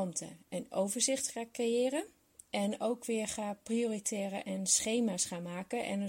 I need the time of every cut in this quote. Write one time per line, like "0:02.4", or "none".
none